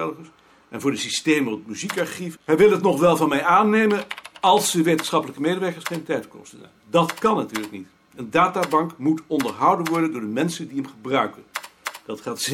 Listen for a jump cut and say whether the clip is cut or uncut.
cut